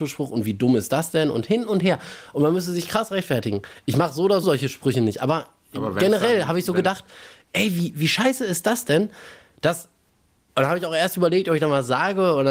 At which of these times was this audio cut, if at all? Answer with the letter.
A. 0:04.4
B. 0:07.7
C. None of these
A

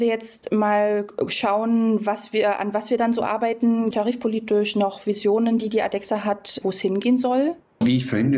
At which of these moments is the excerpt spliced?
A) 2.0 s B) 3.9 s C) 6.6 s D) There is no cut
B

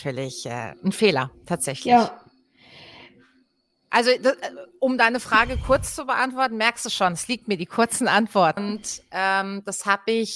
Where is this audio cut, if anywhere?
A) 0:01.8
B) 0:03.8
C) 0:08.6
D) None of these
C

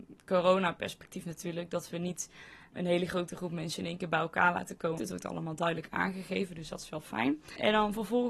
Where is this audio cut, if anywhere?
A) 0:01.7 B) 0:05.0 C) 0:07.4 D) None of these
B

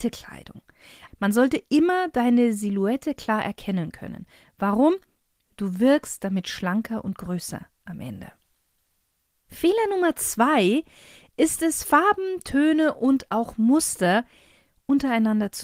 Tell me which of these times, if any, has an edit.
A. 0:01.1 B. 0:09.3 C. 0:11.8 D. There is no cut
A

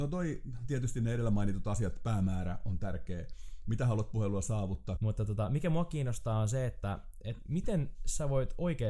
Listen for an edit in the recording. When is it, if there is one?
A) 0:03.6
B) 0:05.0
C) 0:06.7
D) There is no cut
B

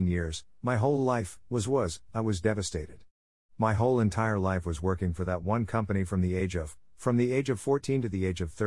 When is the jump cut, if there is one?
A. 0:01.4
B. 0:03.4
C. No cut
C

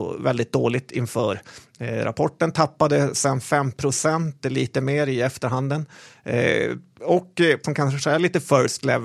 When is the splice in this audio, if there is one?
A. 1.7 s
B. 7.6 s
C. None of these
B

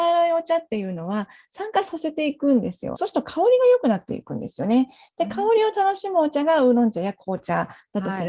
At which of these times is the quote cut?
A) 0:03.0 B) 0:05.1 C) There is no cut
A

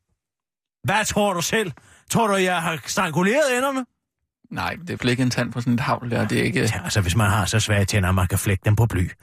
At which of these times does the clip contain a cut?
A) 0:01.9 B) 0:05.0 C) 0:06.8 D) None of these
B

